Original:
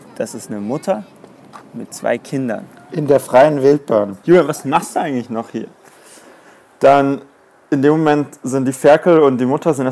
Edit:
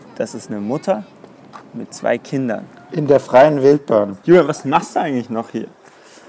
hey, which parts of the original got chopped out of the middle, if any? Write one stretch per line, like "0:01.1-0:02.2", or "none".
none